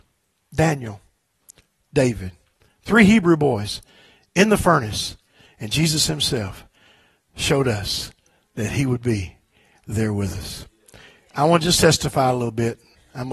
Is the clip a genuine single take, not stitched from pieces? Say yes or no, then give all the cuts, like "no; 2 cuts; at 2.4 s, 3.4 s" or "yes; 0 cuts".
yes; 0 cuts